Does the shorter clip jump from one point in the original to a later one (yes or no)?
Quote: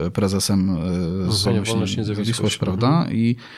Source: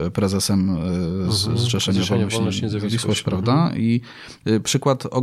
yes